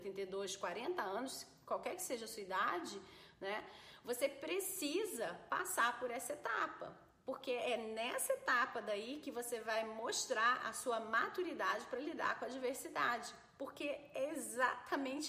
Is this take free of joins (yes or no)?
yes